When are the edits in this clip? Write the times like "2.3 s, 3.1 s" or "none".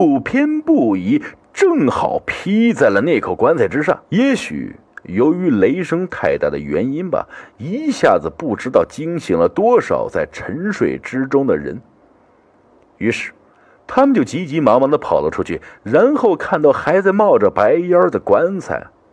4.0 s